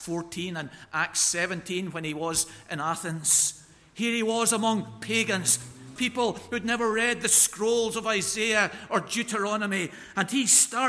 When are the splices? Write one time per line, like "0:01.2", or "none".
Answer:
0:06.0